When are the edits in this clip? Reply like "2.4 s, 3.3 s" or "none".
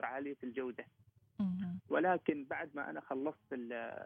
1.9 s